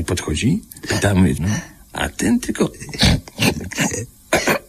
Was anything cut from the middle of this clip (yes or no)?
yes